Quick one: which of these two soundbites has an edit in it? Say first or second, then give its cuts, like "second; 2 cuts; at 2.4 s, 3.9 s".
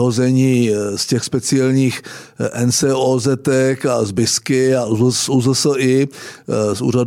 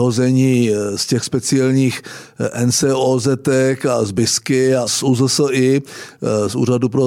second; 1 cut; at 4.9 s